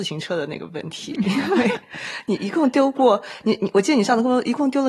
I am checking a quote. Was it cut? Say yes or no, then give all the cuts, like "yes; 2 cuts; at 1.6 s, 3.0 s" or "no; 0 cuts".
no; 0 cuts